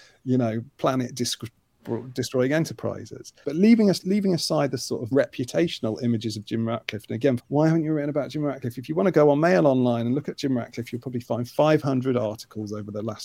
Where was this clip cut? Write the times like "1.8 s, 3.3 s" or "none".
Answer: 3.4 s, 5.1 s, 7.4 s